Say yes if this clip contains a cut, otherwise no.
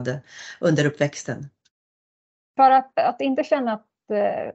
no